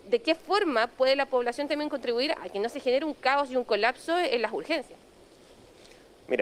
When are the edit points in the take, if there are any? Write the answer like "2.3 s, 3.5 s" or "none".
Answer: 2.3 s